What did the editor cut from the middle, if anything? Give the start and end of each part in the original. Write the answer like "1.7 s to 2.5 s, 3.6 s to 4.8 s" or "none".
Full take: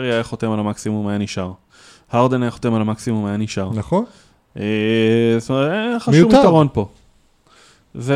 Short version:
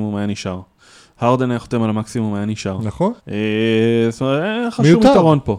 4.1 s to 4.5 s

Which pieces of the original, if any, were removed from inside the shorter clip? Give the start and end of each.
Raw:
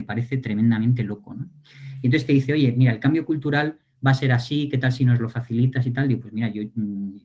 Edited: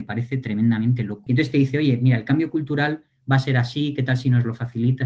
1.3 s to 2.0 s

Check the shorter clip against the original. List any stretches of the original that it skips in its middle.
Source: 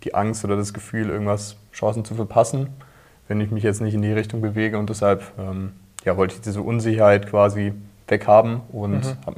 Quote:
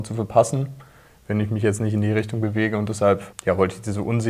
5.3 s to 5.9 s

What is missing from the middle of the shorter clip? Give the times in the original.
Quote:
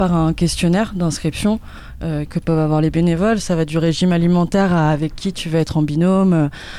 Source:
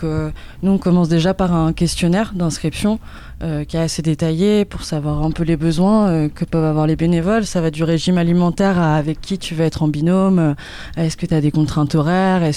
3.6 s to 6.3 s

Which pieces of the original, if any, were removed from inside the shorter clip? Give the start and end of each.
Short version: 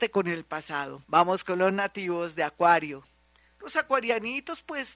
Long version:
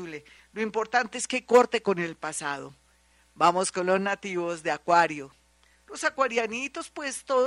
2.8 s to 3.3 s

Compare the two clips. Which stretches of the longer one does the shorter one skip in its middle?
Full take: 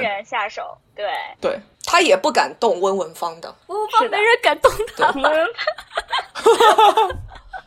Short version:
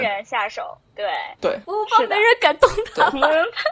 1.6 s to 3.7 s

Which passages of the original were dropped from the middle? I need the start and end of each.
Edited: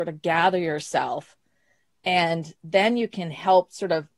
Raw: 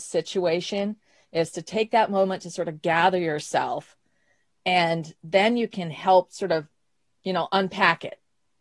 none

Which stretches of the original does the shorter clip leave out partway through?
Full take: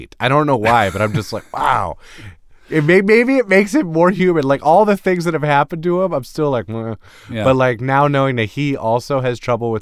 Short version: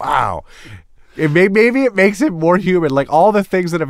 none

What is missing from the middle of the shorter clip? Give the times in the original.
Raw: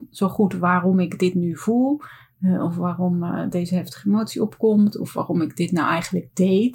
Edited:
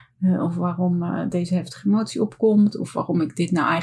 none

